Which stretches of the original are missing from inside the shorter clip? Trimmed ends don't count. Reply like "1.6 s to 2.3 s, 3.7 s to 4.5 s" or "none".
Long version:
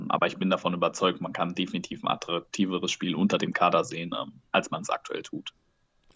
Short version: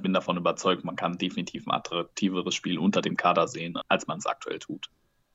4.2 s to 4.4 s